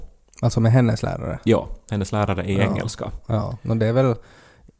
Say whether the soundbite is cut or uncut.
uncut